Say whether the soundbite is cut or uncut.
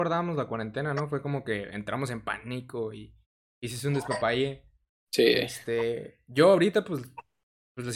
uncut